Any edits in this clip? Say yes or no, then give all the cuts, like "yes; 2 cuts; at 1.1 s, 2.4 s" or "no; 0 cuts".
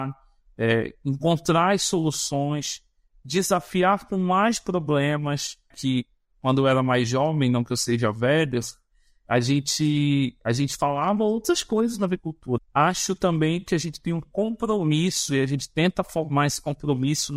yes; 2 cuts; at 5.7 s, 12.6 s